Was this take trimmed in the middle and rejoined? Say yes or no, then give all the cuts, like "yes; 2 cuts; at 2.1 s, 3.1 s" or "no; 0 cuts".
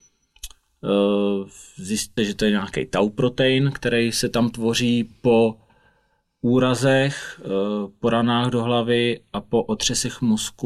yes; 1 cut; at 2.2 s